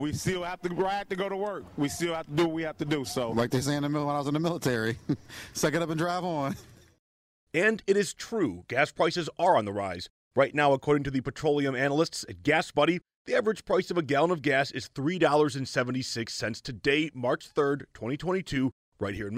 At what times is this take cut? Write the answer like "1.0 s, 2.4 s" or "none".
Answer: none

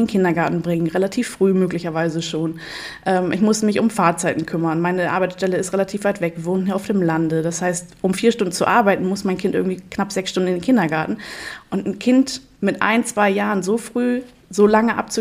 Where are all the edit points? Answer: none

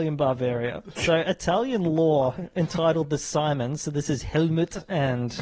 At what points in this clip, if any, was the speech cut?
1.0 s

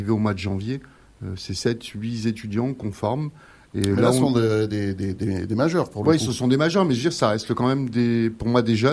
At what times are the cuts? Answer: none

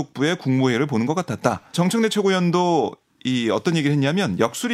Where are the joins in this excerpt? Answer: 1.7 s

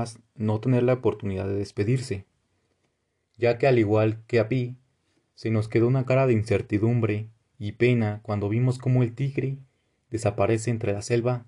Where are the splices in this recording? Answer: none

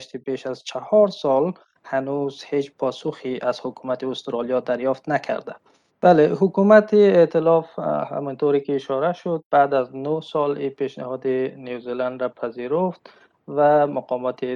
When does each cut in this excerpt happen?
5.9 s

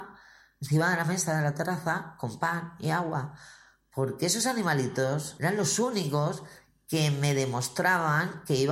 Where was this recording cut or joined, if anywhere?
5.4 s

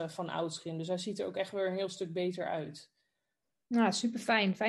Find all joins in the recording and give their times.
none

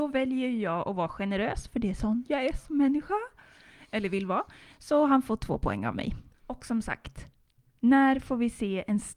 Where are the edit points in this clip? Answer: none

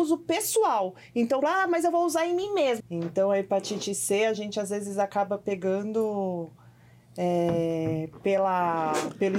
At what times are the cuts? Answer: 1.4 s, 2.8 s

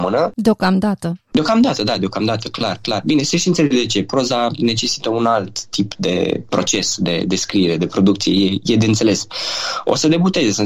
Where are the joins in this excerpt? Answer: none

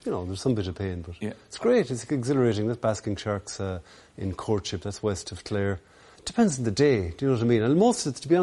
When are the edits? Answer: 6.1 s

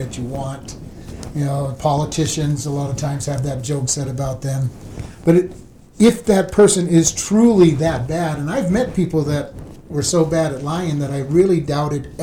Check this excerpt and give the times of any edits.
none

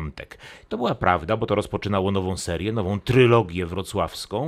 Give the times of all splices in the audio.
none

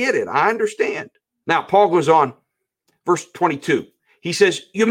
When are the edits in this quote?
1.4 s

